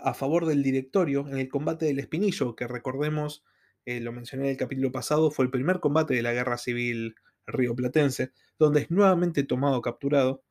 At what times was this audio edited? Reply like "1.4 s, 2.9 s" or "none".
none